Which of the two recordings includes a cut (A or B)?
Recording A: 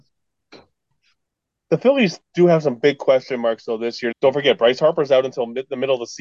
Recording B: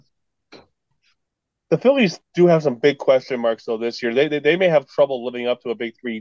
A